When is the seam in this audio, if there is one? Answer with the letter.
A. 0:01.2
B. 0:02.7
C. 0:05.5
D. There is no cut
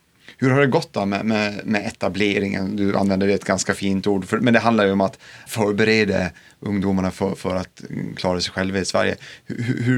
C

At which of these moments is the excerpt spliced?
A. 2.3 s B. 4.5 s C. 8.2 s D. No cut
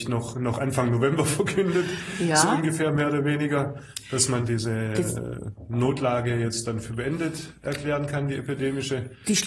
B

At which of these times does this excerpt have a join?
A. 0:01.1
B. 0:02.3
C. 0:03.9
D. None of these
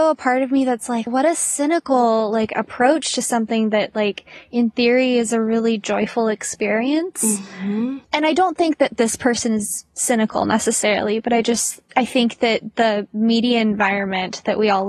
A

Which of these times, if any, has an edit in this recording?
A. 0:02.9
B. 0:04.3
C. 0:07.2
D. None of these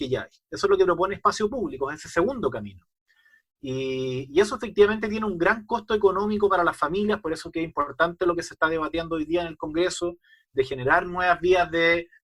D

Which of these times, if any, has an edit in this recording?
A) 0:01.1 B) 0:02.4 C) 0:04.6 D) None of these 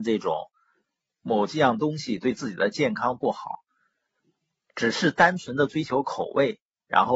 A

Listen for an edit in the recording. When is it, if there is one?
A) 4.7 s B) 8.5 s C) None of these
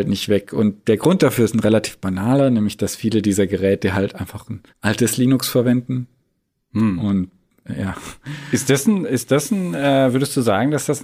A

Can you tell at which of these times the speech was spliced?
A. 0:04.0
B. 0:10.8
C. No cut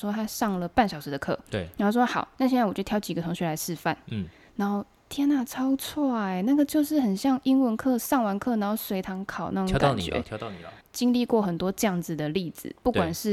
B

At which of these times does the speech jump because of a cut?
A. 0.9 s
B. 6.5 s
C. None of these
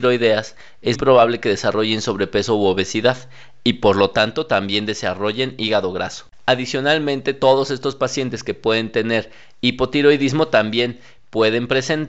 A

